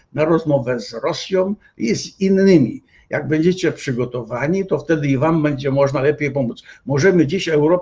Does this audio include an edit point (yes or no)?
no